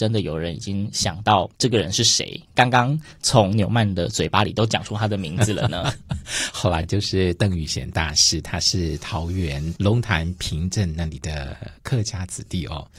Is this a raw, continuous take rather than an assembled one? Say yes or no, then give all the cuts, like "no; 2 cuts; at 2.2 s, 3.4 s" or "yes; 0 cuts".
yes; 0 cuts